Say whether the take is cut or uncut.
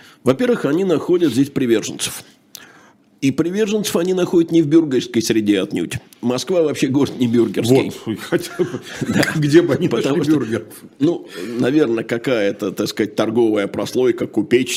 uncut